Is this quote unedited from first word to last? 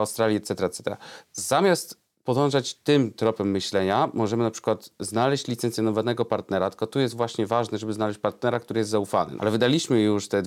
no; 2 cuts; at 1.2 s, 9.4 s

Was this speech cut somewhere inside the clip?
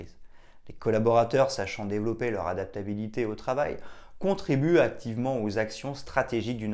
no; 0 cuts

